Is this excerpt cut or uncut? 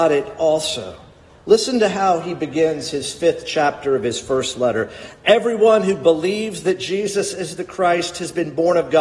uncut